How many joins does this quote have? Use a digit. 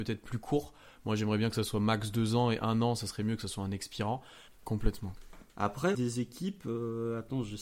2